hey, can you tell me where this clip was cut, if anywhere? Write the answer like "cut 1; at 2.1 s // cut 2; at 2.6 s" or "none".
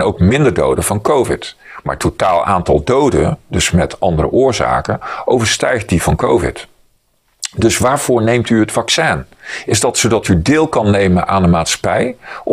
none